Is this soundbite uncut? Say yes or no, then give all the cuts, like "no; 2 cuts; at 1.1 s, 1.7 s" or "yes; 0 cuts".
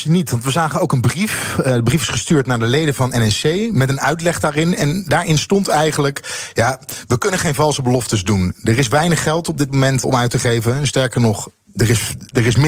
no; 1 cut; at 10.0 s